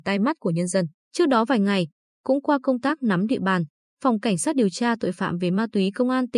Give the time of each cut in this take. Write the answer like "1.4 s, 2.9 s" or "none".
1.1 s